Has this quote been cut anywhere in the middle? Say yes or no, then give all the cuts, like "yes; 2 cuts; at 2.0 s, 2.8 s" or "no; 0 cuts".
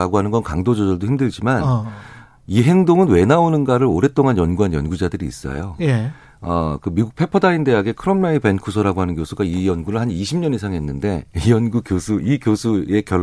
no; 0 cuts